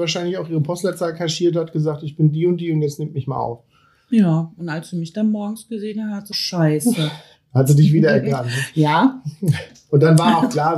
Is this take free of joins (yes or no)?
no